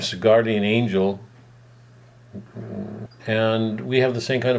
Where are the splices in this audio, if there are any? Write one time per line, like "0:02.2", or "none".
0:03.1